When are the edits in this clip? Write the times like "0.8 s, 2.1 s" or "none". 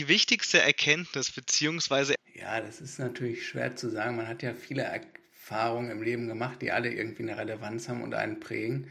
2.2 s